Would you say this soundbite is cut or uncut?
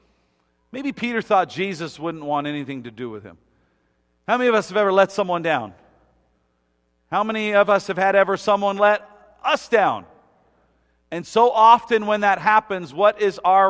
uncut